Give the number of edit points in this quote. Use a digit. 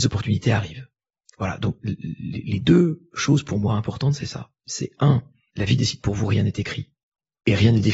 0